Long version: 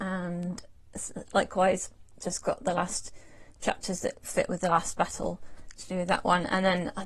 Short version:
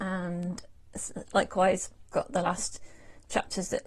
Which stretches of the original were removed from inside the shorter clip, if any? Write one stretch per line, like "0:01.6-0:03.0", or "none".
0:02.1-0:02.4